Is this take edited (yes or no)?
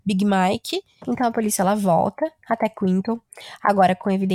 yes